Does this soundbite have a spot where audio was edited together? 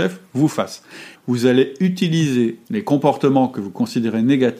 yes; 2 cuts; at 1.1 s, 2.7 s

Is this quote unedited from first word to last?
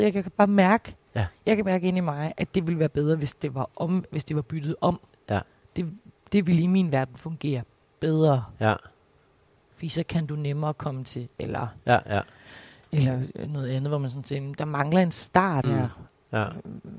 no; 1 cut; at 15.6 s

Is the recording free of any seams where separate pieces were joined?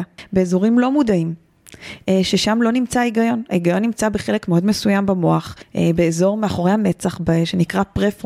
yes; 0 cuts

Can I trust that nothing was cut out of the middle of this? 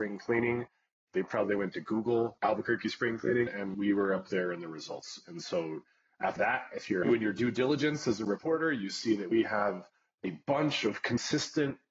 no; 1 cut; at 3.5 s

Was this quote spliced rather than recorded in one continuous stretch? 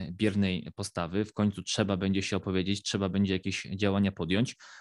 no; 0 cuts

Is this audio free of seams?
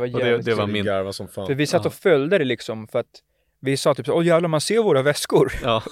yes; 0 cuts

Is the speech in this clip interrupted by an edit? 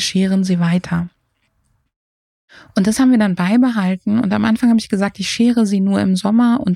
no; 0 cuts

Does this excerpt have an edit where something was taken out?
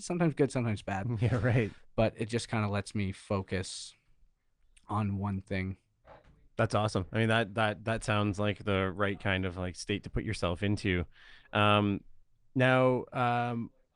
no; 0 cuts

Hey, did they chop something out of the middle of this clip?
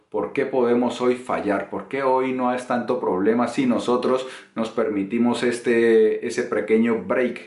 no; 0 cuts

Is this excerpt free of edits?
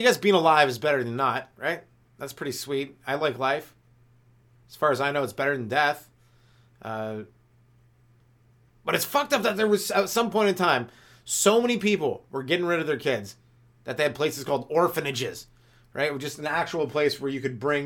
yes; 0 cuts

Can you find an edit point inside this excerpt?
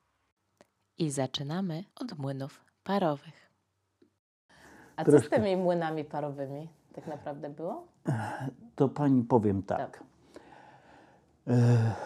yes; 1 cut; at 1.9 s

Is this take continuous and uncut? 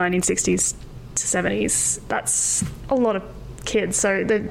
yes; 0 cuts

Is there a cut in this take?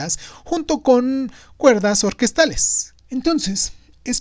yes; 1 cut; at 3.0 s

